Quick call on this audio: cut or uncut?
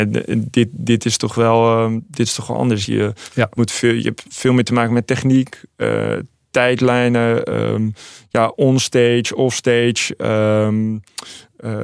cut